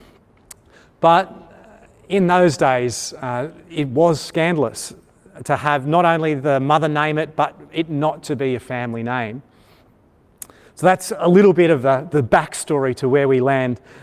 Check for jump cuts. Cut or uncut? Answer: uncut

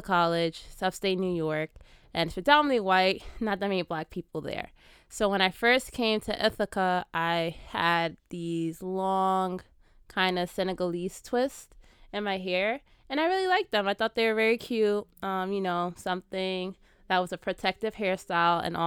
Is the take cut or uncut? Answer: uncut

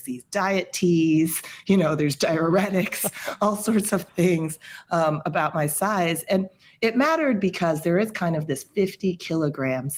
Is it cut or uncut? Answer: uncut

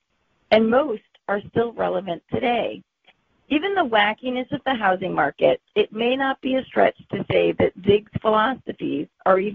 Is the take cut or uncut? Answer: uncut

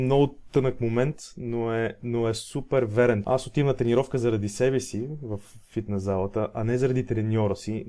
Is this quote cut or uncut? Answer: cut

